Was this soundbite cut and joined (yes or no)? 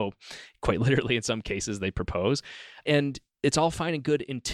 no